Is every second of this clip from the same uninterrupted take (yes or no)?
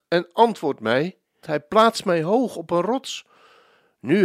no